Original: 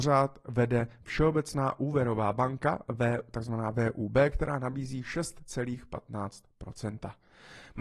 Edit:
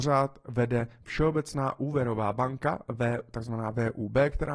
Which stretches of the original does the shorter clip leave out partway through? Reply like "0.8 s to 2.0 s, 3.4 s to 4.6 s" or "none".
none